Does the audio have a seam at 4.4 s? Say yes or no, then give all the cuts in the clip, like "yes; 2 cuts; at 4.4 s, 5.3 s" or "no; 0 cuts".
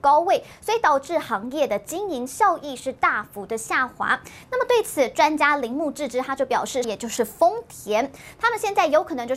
yes; 2 cuts; at 4.4 s, 6.8 s